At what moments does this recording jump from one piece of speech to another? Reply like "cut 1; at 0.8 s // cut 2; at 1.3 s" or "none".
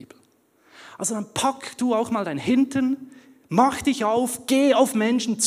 none